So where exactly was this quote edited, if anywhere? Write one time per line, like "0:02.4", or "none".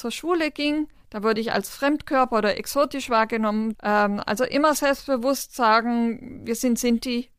0:03.7